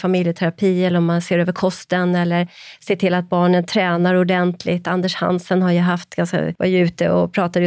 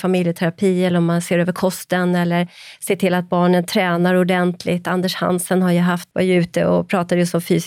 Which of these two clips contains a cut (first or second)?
second